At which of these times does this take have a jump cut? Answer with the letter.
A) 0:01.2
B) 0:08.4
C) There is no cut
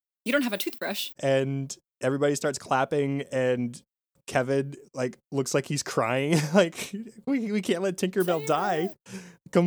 A